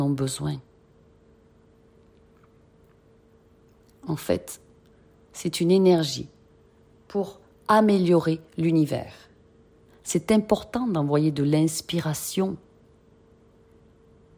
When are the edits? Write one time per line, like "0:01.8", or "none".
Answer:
0:05.1
0:09.9